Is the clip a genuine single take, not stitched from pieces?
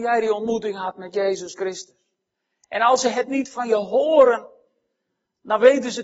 yes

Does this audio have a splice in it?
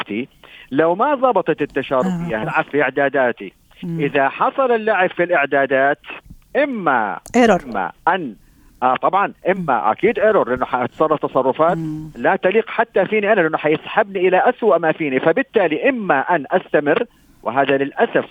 yes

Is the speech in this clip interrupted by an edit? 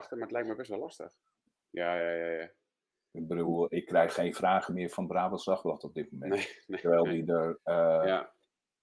yes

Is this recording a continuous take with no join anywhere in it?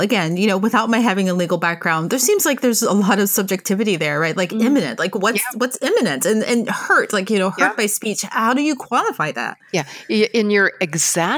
yes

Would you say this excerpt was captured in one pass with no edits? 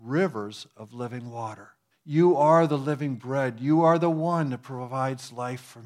no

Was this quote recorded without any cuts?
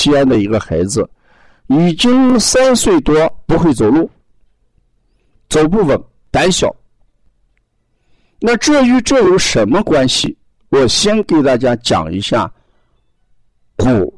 yes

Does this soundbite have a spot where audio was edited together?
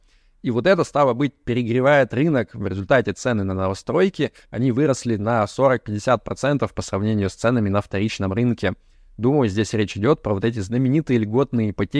no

